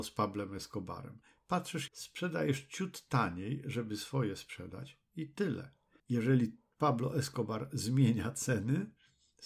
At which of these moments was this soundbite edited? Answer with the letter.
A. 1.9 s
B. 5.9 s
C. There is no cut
A